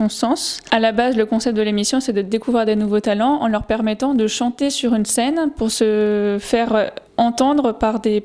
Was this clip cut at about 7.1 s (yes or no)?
yes